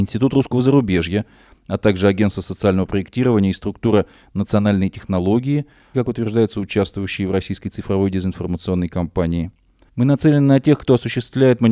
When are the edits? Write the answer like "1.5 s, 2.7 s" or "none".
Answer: 5.9 s, 9.9 s